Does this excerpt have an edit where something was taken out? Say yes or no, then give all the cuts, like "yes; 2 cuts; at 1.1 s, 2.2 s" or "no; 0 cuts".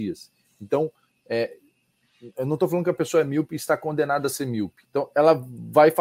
yes; 1 cut; at 4.8 s